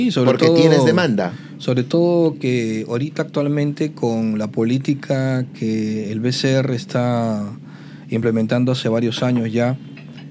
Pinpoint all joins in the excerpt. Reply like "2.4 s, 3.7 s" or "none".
none